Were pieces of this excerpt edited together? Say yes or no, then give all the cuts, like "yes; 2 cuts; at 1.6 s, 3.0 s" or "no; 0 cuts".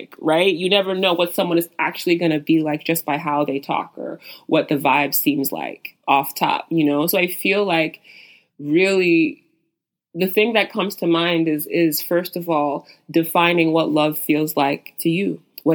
no; 0 cuts